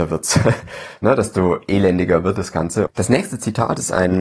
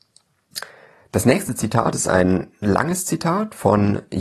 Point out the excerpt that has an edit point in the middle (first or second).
first